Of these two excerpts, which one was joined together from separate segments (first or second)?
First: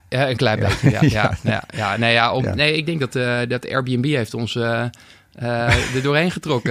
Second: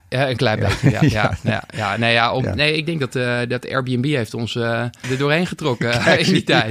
second